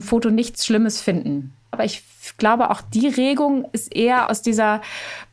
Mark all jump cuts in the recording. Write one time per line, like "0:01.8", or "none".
0:01.7
0:04.3